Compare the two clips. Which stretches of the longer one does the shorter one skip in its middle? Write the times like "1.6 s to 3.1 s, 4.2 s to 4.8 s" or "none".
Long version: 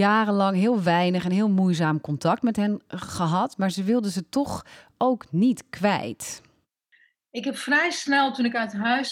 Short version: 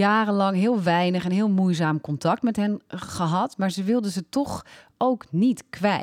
none